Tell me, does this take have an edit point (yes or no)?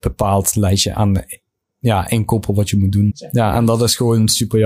yes